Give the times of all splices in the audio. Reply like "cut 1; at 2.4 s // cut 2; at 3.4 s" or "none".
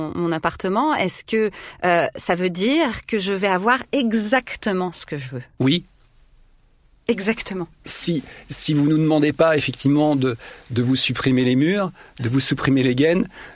cut 1; at 7.8 s